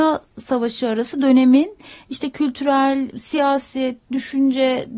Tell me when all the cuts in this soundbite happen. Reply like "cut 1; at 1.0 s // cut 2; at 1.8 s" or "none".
cut 1; at 3.1 s